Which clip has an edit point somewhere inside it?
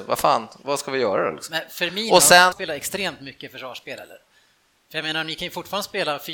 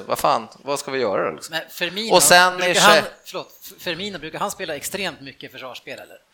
first; 1 cut; at 2.5 s

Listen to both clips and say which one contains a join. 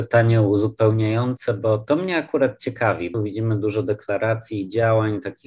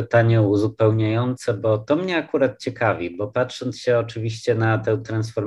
first; 1 cut; at 3.1 s

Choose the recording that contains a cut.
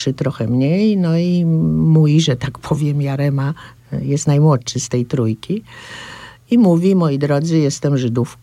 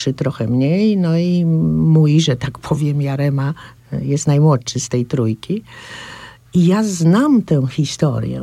second; 1 cut; at 6.5 s

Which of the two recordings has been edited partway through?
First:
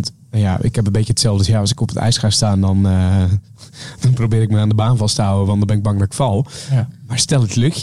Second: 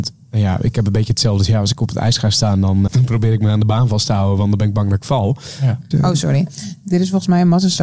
second; 2 cuts; at 2.9 s, 5.9 s

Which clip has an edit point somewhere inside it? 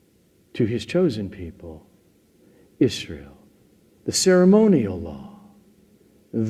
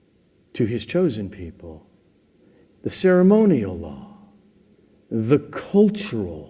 second; 1 cut; at 2.6 s

